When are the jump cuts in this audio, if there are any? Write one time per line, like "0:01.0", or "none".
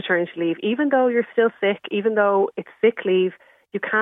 none